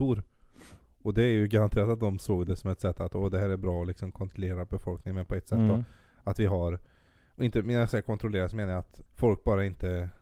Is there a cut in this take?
yes; 1 cut; at 9.1 s

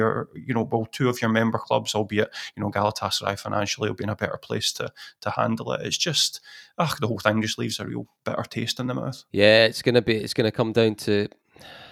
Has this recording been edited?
no; 0 cuts

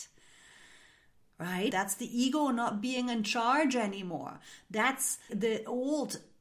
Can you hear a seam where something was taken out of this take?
yes; 2 cuts; at 1.7 s, 5.3 s

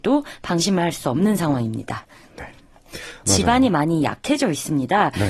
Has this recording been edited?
yes; 1 cut; at 3.2 s

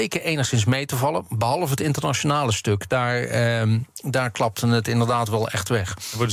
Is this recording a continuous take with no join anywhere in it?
yes; 0 cuts

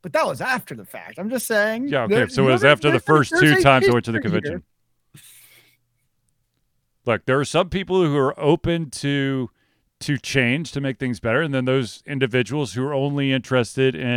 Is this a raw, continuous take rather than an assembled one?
yes; 0 cuts

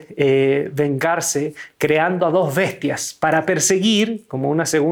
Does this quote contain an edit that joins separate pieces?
no; 0 cuts

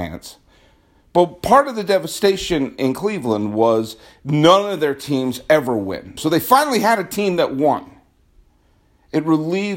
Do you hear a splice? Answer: yes; 1 cut; at 6.2 s

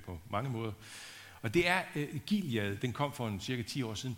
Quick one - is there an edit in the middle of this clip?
no; 0 cuts

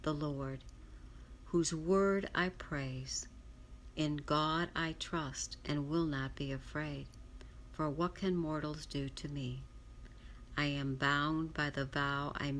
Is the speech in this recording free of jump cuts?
yes; 0 cuts

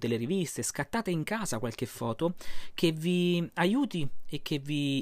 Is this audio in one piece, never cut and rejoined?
yes; 0 cuts

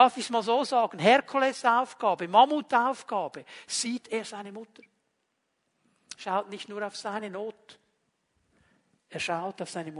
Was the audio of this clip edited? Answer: no; 0 cuts

